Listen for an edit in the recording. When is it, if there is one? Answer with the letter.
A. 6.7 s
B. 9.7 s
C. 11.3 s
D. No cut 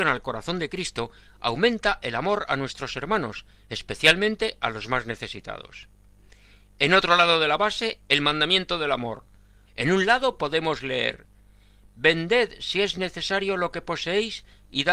B